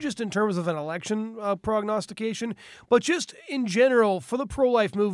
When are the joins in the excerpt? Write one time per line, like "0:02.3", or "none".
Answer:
none